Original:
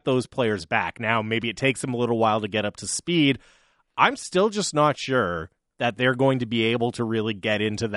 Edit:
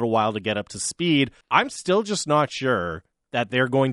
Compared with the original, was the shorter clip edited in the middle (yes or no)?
yes